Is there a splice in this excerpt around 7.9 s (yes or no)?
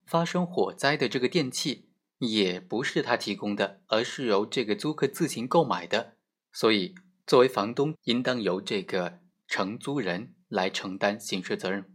yes